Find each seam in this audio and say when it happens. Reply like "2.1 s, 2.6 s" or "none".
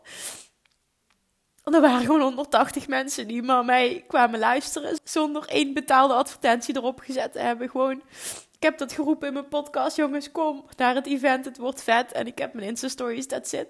5.0 s